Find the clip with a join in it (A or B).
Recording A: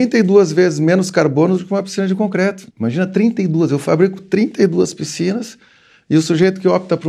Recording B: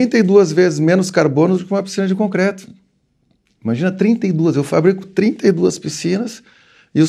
A